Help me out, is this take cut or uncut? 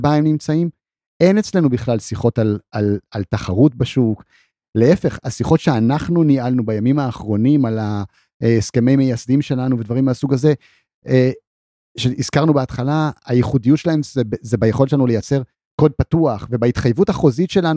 uncut